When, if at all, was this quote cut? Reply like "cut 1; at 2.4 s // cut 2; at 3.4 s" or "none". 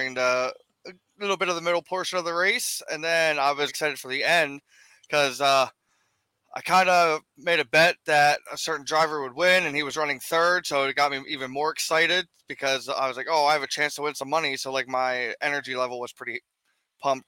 cut 1; at 3.7 s